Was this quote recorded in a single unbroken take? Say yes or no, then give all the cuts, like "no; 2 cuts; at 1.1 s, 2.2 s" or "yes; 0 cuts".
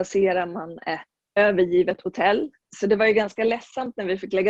no; 2 cuts; at 1.4 s, 2.7 s